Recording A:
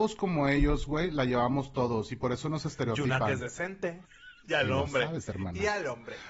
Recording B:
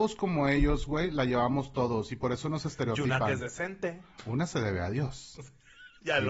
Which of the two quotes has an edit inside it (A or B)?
A